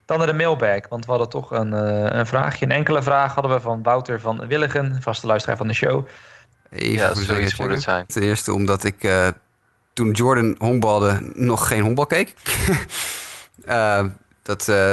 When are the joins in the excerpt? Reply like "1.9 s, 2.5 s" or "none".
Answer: 6.5 s, 8.1 s